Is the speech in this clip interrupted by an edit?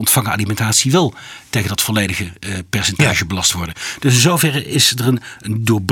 no; 0 cuts

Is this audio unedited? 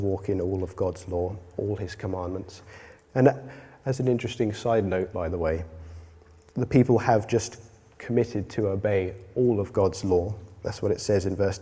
no; 2 cuts; at 3.0 s, 5.1 s

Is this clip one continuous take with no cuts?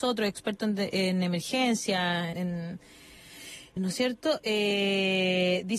no; 2 cuts; at 2.3 s, 3.8 s

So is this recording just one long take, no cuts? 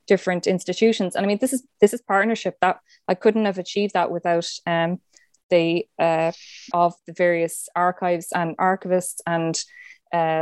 no; 1 cut; at 6.7 s

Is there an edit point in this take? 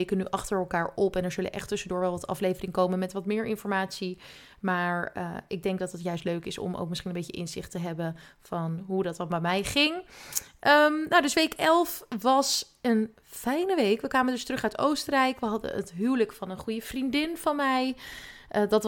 no; 0 cuts

